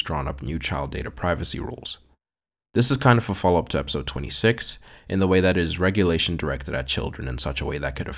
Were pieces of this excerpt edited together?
no; 0 cuts

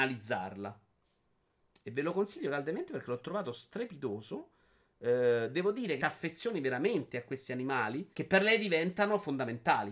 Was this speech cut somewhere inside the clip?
yes; 2 cuts; at 6.0 s, 8.1 s

